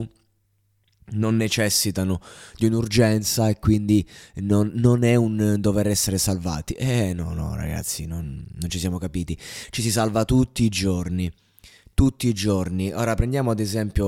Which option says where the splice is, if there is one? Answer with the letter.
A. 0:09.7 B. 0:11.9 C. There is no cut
C